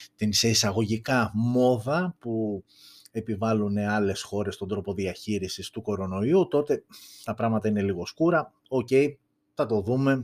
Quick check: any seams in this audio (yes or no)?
no